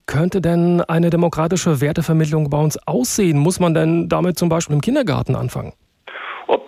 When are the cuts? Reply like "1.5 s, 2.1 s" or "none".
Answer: 4.7 s